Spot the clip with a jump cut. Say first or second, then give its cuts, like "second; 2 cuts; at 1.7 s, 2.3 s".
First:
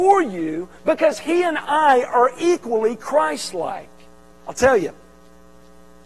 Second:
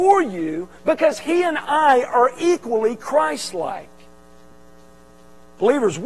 first; 1 cut; at 4.3 s